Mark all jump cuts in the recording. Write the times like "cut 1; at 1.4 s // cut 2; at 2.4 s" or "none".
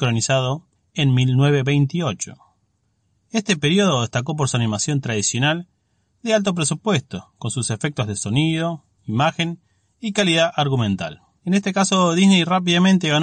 cut 1; at 11.4 s